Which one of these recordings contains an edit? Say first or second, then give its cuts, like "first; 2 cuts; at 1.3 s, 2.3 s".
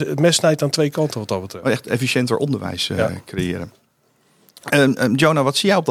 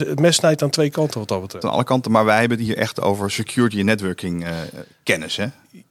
second; 1 cut; at 1.6 s